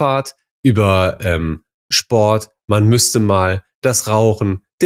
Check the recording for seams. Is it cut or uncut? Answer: uncut